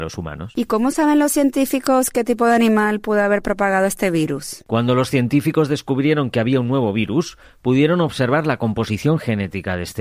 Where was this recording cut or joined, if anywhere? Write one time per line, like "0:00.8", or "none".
none